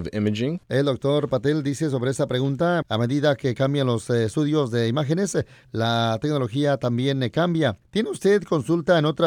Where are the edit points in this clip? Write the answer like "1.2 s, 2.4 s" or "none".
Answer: 2.8 s, 7.8 s

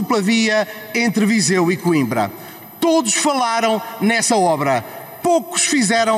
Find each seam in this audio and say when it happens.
none

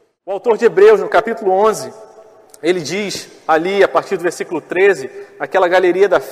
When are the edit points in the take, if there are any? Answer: none

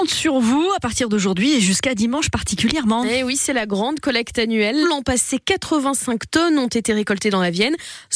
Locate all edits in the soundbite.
4.8 s

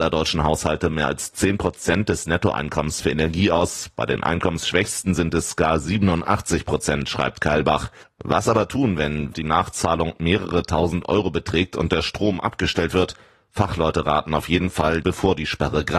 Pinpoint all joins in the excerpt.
8.0 s, 9.3 s, 15.0 s

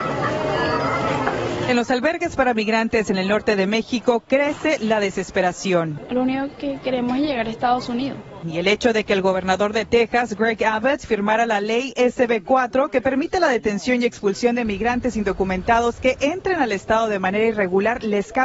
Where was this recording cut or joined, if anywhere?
none

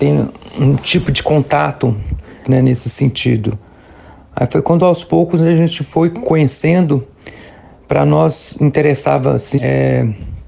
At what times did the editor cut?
2.4 s, 9.6 s

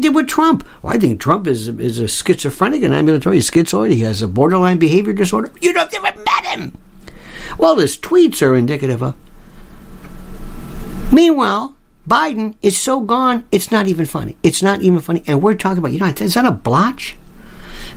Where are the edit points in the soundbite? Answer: none

